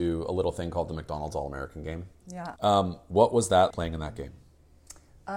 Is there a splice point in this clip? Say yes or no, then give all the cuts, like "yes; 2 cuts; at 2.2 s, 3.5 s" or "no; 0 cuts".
yes; 2 cuts; at 2.6 s, 3.7 s